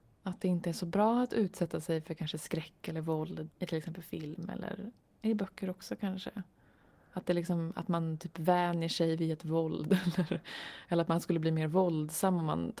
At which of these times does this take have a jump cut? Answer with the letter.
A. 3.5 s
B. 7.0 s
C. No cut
A